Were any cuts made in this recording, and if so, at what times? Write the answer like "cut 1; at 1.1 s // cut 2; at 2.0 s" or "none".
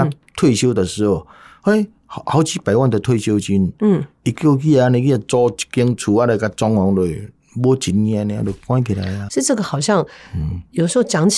cut 1; at 9.3 s